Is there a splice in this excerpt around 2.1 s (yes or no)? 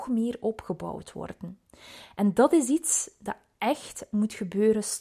no